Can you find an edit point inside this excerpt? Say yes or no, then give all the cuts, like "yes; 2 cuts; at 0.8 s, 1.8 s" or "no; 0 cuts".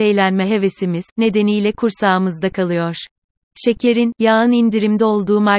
yes; 2 cuts; at 1.1 s, 3.5 s